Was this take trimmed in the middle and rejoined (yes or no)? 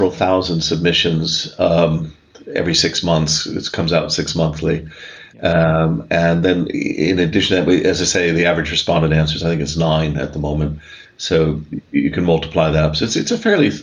no